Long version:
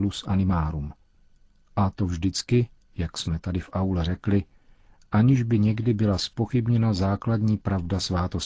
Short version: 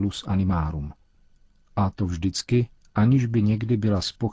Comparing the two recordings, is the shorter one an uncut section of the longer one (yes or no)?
no